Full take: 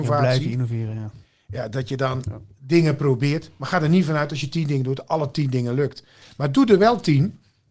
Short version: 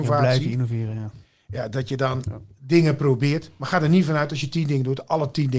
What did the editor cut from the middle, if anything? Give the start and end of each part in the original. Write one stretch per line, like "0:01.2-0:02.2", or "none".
none